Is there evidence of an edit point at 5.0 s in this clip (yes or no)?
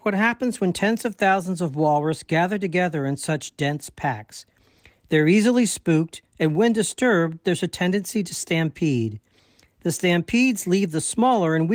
no